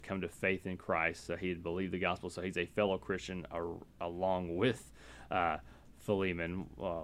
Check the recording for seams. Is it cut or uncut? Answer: uncut